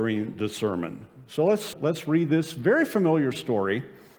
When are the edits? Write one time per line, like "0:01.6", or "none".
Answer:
0:01.7